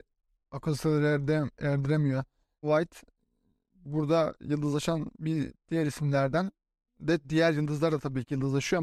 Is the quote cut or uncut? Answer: cut